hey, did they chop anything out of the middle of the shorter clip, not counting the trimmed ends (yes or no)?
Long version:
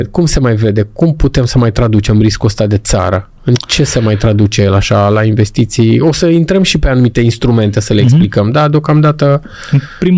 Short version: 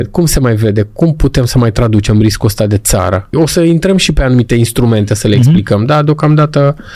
yes